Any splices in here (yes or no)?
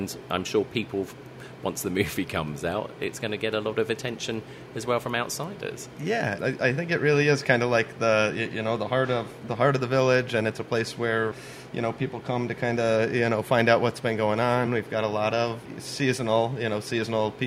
no